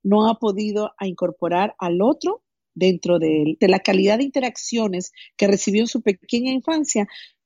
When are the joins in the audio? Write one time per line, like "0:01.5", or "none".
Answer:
0:03.6